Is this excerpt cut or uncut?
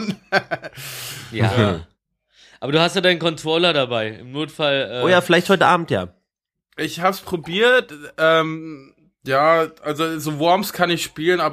uncut